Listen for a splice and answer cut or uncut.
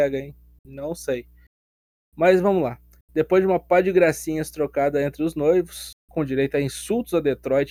uncut